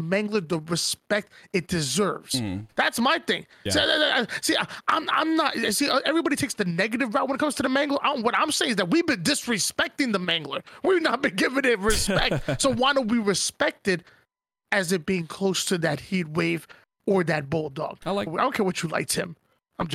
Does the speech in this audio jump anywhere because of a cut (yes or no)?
yes